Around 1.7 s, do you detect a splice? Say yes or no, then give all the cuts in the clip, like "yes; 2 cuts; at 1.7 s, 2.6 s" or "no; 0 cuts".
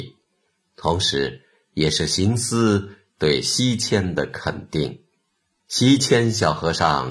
no; 1 cut; at 5.6 s